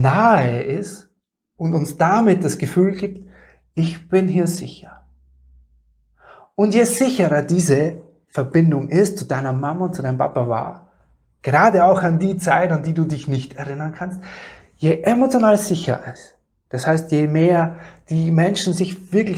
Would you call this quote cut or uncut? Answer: uncut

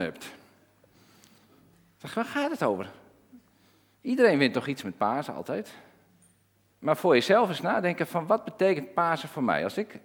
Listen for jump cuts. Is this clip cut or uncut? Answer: cut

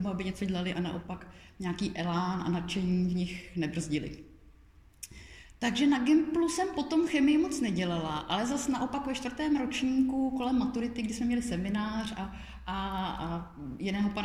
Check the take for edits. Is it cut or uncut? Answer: uncut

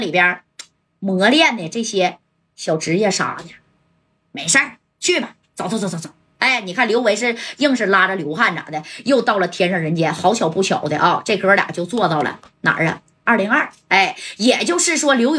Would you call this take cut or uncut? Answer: uncut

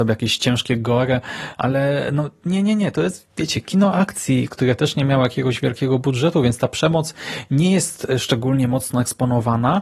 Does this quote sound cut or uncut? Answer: uncut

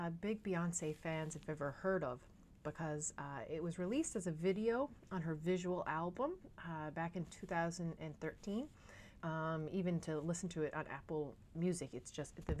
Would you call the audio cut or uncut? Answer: cut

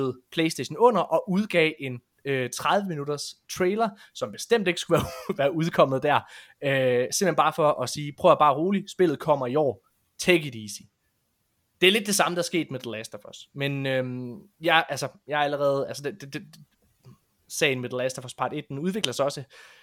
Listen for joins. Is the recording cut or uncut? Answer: uncut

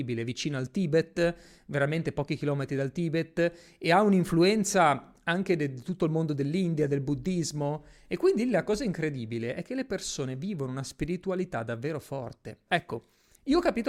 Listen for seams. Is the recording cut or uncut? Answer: cut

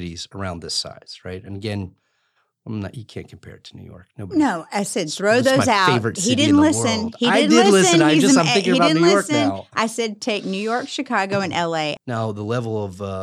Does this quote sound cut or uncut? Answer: cut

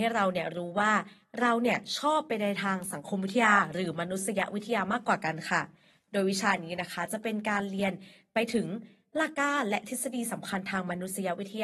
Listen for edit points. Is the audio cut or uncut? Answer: cut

